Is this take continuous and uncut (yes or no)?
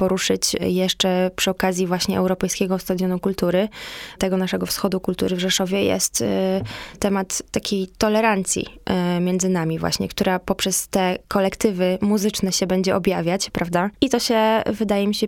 no